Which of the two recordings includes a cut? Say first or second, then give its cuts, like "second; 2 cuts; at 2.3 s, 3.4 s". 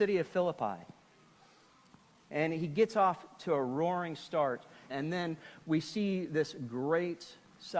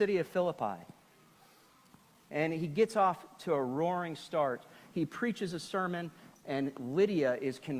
first; 1 cut; at 4.9 s